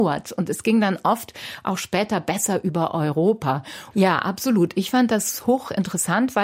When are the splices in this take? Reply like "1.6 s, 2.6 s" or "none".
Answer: 3.9 s